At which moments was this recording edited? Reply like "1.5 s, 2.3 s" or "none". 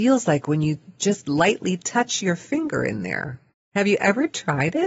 none

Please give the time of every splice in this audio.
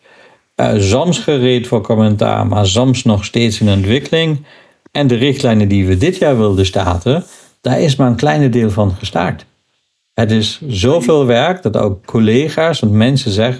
none

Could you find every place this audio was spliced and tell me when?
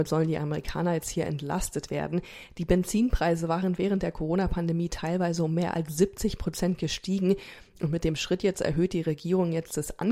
none

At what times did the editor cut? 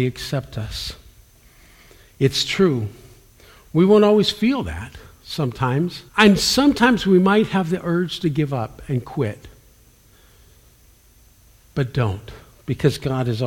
6.1 s

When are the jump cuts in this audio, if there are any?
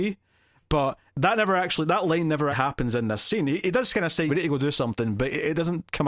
1.1 s, 2.5 s, 4.3 s

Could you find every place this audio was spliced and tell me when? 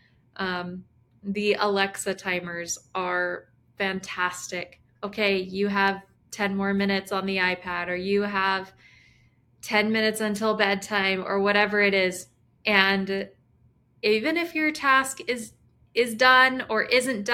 5.0 s, 12.6 s

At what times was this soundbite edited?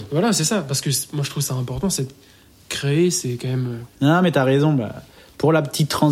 3.9 s

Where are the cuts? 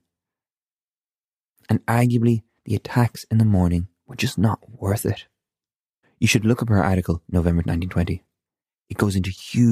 6.0 s, 7.3 s

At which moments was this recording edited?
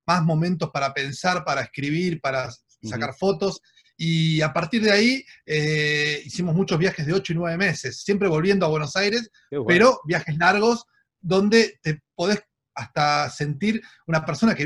none

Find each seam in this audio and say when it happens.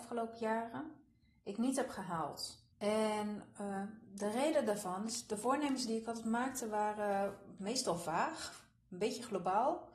2.7 s

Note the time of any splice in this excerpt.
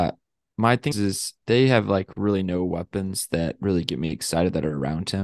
0.9 s

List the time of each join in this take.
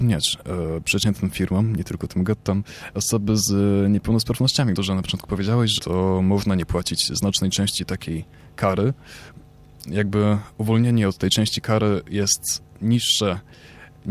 4.7 s, 5.8 s, 9.9 s

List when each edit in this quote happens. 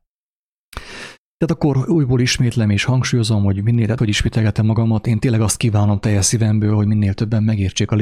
4.0 s

